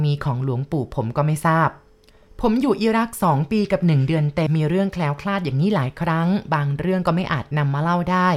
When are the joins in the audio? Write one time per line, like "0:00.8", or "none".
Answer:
0:04.5